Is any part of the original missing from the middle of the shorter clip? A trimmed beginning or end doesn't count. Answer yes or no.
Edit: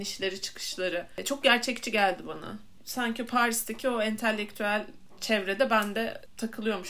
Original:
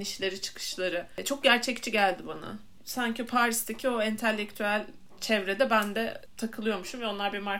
no